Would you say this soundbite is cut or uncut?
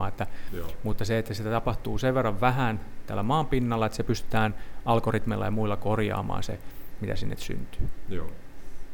cut